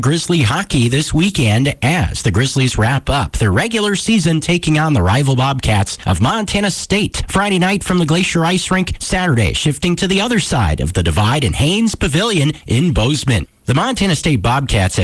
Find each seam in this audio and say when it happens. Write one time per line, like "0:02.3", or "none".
none